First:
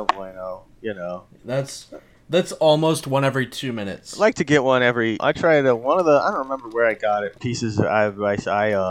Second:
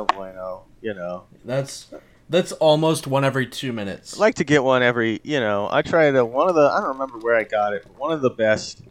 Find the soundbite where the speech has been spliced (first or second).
first